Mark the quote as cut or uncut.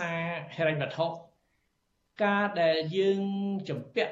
uncut